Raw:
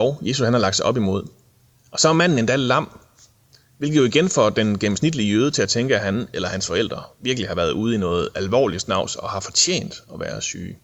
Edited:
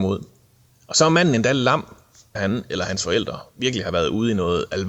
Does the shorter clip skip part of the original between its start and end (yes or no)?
yes